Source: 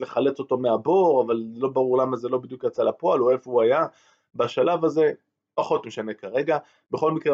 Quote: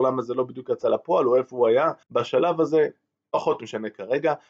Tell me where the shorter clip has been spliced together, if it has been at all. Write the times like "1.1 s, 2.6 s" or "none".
2.0 s